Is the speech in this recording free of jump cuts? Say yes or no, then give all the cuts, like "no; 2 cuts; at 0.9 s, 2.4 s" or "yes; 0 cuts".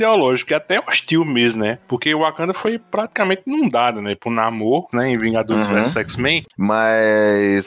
no; 2 cuts; at 4.9 s, 6.5 s